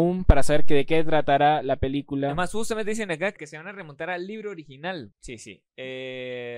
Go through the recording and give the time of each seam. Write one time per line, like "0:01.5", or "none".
0:03.4
0:05.1